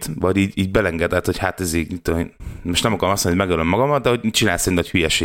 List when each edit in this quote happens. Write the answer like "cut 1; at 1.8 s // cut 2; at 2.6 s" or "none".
none